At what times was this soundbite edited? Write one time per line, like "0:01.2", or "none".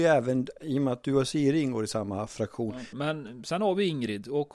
0:02.9